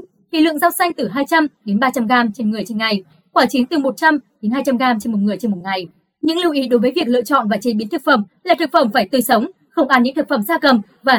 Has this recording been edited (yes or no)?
no